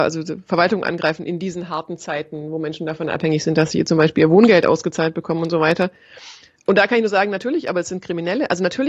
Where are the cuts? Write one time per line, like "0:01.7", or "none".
none